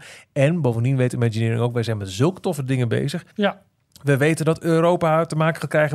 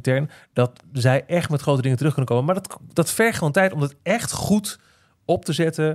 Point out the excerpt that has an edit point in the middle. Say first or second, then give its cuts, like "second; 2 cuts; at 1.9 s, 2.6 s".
first; 1 cut; at 3.3 s